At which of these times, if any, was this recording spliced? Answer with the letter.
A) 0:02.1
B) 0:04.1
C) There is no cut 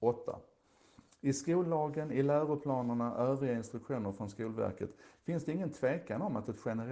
C